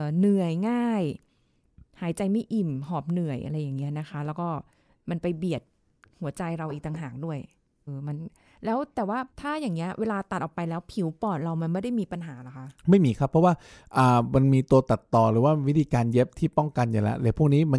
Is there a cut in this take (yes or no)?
yes